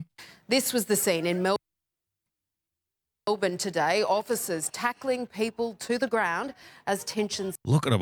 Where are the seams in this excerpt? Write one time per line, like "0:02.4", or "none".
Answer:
none